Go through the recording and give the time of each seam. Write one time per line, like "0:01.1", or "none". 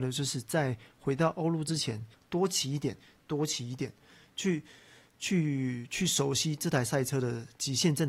0:02.1